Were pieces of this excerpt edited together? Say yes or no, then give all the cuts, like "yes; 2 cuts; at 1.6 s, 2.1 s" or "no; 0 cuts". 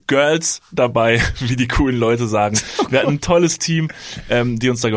no; 0 cuts